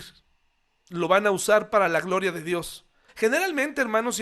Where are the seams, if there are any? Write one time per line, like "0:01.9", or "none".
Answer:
0:03.1